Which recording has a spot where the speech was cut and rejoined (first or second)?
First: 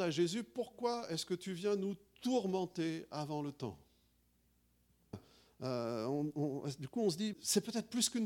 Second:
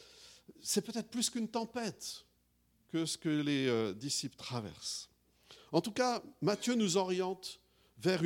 first